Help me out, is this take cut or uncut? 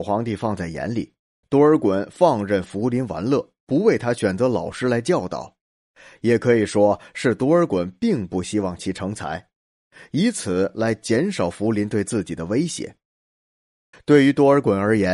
cut